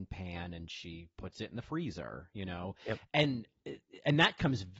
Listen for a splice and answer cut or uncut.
uncut